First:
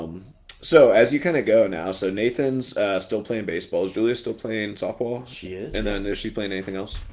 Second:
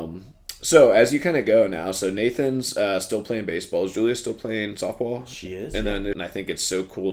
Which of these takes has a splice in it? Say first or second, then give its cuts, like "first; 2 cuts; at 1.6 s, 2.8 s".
second; 1 cut; at 6.1 s